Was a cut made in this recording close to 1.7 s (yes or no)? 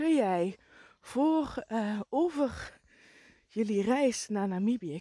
no